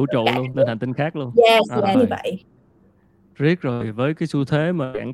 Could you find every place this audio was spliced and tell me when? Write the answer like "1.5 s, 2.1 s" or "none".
1.9 s